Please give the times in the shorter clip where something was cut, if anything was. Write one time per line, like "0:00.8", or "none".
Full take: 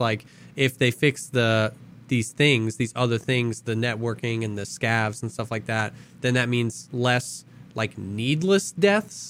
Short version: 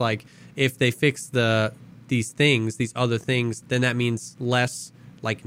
0:03.6